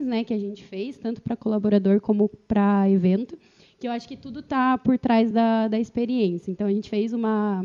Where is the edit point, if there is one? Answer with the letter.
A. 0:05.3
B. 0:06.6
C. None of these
C